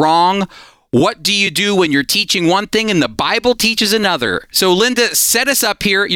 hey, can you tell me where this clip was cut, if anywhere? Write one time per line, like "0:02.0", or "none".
none